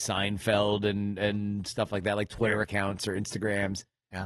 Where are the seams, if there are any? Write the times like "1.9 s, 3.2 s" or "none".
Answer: none